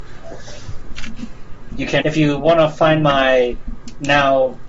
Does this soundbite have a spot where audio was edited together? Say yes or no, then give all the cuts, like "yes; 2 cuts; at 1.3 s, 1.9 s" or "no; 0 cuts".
yes; 1 cut; at 2.0 s